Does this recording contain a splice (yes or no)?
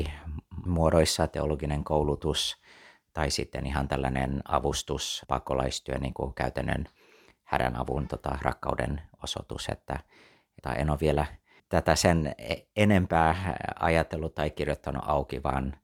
no